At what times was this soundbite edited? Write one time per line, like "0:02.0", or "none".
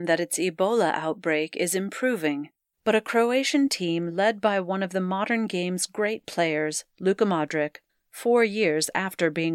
0:02.7
0:07.9